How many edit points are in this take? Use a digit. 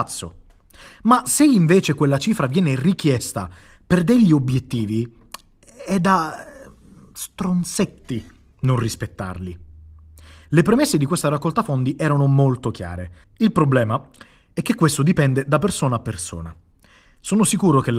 1